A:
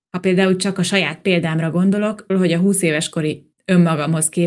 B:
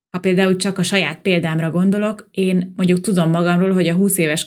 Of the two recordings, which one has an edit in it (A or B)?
A